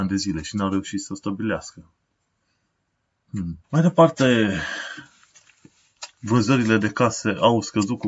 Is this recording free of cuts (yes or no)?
no